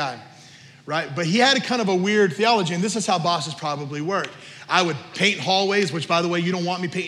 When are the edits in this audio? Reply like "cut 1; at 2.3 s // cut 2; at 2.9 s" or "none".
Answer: none